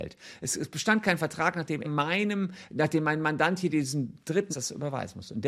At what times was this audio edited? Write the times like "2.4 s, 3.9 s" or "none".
1.8 s, 4.5 s